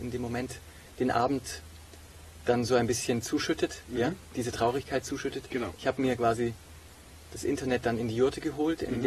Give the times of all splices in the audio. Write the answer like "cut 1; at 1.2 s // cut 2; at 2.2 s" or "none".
cut 1; at 5.7 s